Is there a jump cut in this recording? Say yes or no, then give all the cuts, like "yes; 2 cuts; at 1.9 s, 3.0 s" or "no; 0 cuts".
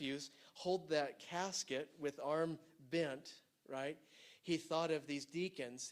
no; 0 cuts